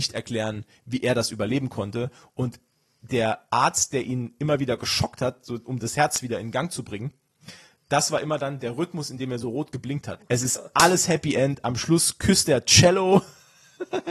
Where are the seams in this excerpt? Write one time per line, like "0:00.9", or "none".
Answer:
0:10.2